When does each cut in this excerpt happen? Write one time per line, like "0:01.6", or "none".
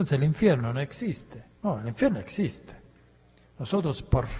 none